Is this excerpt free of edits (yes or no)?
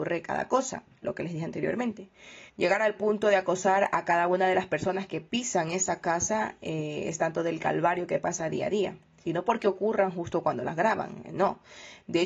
no